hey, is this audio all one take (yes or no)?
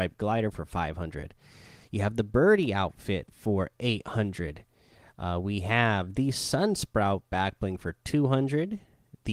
yes